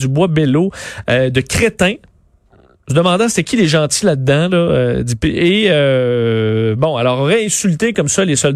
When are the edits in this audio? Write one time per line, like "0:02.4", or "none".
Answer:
none